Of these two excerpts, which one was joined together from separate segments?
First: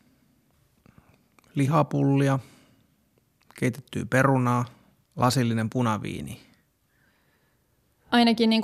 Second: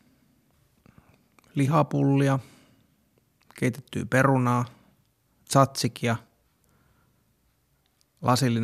first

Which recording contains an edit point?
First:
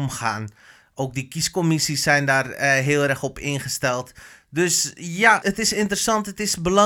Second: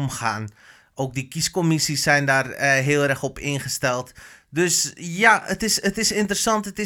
first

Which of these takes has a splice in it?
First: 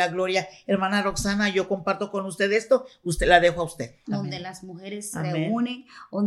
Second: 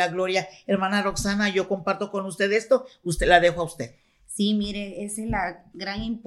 first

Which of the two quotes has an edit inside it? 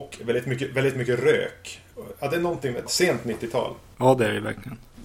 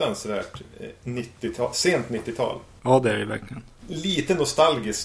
first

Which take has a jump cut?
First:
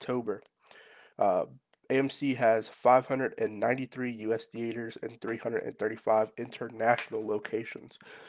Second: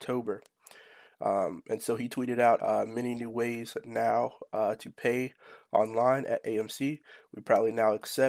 second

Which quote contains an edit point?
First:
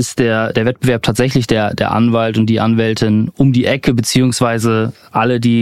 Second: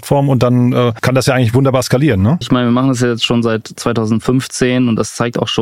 second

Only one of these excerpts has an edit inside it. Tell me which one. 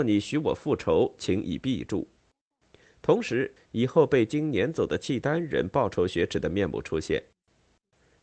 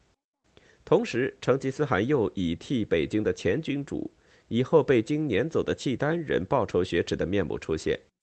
first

